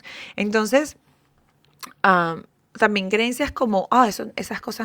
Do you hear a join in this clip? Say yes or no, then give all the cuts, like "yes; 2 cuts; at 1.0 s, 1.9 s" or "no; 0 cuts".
no; 0 cuts